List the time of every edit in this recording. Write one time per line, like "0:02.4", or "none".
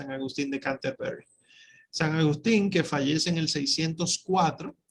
none